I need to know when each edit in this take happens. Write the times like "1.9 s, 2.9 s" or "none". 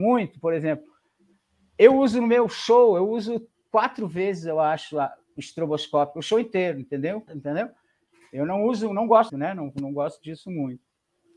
7.3 s, 9.3 s